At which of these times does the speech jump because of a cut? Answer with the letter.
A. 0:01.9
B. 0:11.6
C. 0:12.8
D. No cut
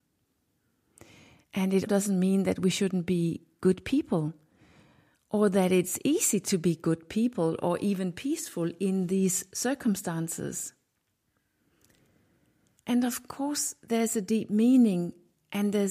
A